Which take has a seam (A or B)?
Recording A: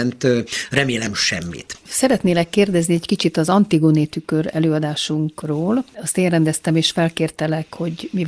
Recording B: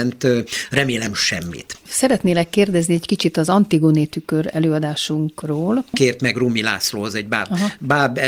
B